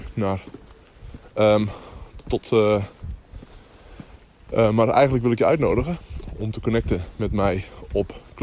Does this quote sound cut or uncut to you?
cut